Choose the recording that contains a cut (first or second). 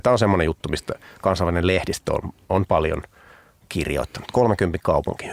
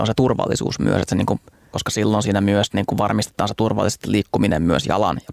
second